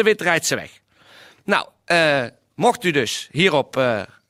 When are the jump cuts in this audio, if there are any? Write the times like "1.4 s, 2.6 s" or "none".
none